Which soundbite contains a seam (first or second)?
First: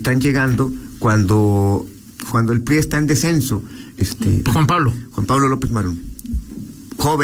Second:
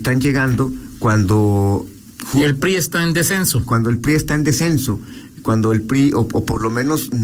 first